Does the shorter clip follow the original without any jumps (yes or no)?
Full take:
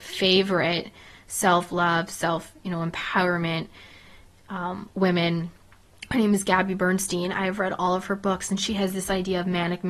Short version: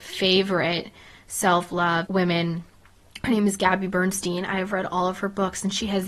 no